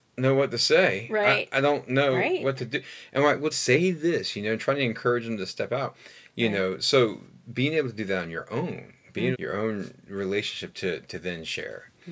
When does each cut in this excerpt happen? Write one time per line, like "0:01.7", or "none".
0:03.5
0:09.3